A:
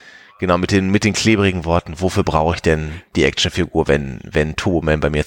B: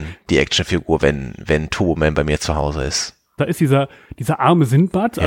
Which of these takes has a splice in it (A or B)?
B